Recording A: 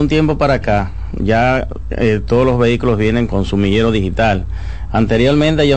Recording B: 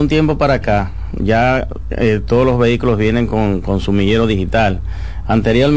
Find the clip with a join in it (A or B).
A